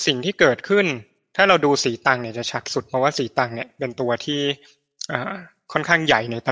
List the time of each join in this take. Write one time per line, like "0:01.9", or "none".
none